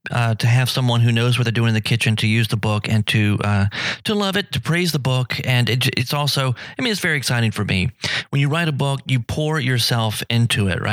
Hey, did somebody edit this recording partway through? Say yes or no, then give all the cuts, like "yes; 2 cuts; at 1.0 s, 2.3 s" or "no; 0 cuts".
no; 0 cuts